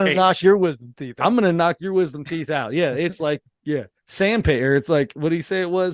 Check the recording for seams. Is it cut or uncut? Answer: uncut